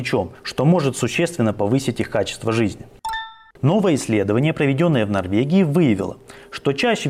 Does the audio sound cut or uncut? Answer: cut